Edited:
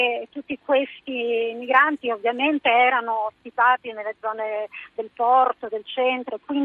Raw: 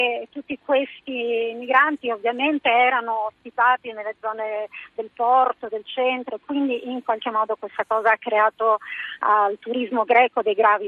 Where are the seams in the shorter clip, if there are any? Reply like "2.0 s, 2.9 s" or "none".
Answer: none